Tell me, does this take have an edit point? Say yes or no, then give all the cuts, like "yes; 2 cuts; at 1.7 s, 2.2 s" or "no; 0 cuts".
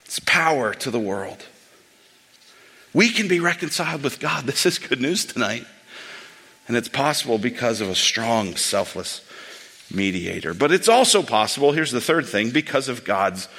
yes; 1 cut; at 8.6 s